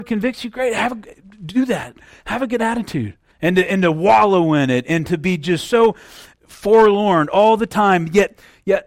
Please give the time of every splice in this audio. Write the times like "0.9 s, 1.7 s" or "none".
3.3 s